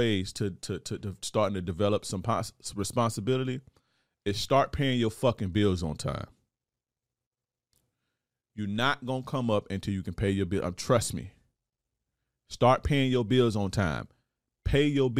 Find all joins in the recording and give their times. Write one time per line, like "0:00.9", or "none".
none